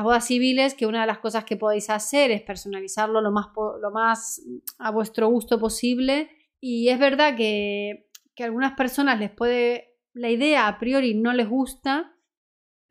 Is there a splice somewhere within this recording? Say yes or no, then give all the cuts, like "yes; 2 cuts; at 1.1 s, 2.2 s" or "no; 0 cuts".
yes; 1 cut; at 6.5 s